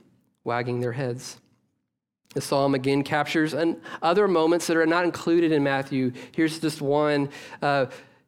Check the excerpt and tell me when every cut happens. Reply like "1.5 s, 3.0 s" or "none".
none